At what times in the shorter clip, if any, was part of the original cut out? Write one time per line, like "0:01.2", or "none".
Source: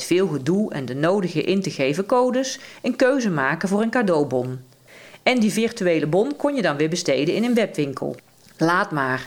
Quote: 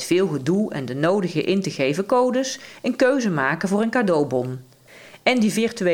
none